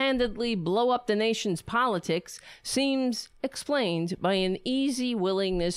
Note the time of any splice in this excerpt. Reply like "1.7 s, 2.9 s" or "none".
none